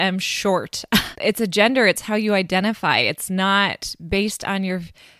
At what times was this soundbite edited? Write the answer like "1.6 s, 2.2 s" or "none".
1.2 s